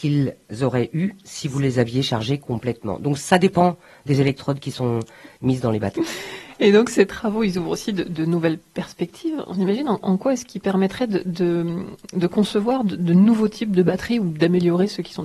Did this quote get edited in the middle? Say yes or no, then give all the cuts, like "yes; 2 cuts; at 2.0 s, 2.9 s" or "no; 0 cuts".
yes; 1 cut; at 5.9 s